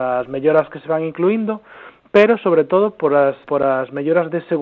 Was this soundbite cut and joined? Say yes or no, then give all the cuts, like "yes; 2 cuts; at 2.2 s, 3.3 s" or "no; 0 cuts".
yes; 1 cut; at 3.4 s